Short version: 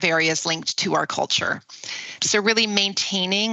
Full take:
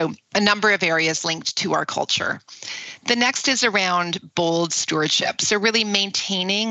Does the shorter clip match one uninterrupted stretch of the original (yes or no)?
no